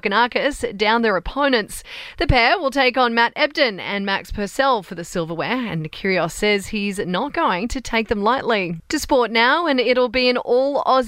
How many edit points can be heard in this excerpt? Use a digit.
1